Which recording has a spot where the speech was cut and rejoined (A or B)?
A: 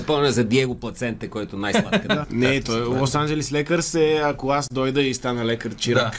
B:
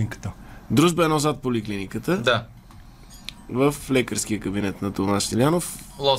A